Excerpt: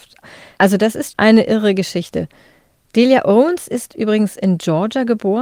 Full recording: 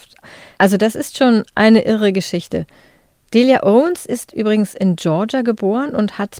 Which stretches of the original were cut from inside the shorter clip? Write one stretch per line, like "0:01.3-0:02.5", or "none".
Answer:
0:01.1-0:01.5